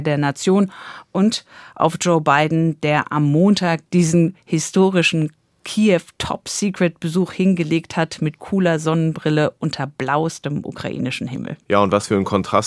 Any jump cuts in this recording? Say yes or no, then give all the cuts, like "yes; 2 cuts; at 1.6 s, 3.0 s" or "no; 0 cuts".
no; 0 cuts